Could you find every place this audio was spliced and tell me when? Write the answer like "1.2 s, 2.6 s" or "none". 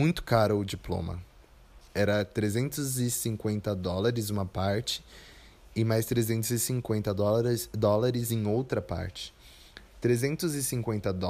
1.9 s

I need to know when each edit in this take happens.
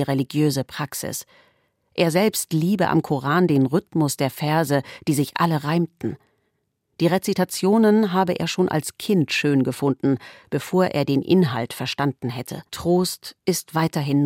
12.7 s

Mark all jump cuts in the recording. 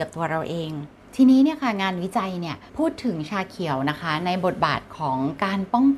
2.7 s

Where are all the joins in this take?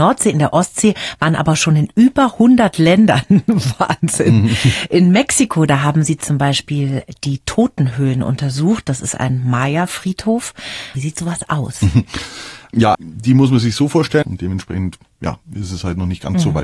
10.9 s, 12.9 s, 14.2 s

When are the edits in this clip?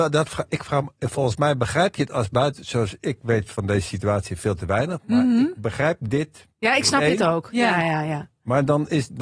none

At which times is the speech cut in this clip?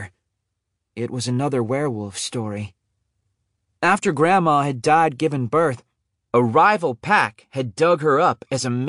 0.9 s

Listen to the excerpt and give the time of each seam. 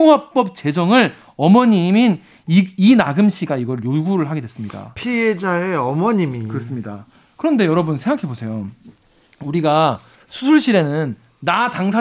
none

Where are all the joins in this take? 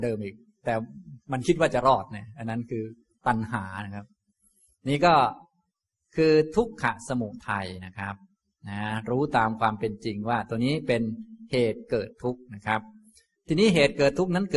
none

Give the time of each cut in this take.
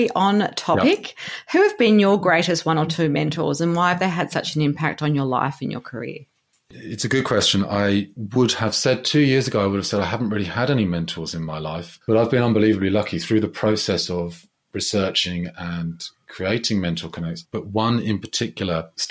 12.0 s, 17.4 s

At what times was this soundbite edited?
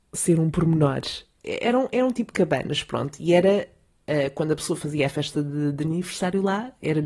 1.4 s

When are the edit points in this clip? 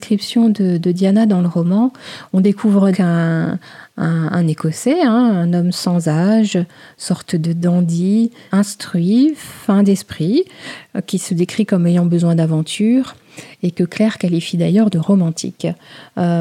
2.9 s, 8.5 s

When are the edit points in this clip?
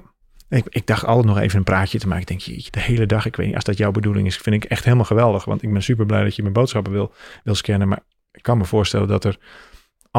2.7 s

